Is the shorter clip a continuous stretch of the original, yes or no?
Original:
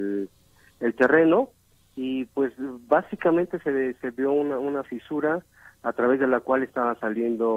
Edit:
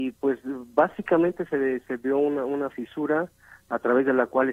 yes